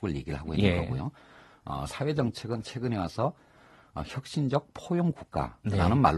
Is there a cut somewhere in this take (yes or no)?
no